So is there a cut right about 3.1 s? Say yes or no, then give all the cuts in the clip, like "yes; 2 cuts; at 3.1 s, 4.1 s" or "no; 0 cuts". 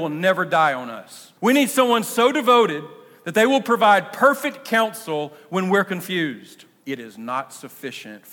no; 2 cuts; at 1.4 s, 6.8 s